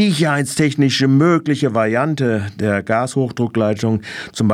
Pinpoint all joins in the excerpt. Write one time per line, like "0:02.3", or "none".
none